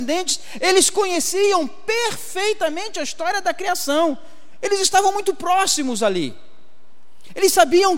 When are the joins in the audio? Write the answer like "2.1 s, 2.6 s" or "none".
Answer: none